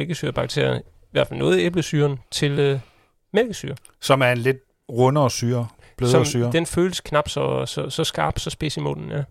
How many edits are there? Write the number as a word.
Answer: zero